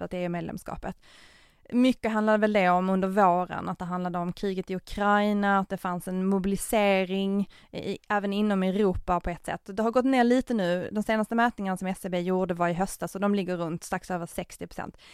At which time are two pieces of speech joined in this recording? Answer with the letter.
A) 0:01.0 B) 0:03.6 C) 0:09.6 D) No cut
D